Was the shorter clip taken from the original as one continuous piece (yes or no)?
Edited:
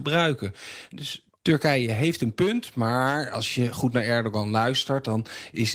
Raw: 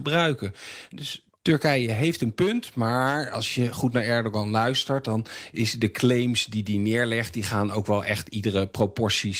yes